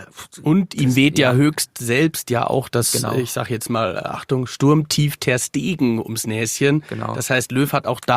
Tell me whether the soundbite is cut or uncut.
uncut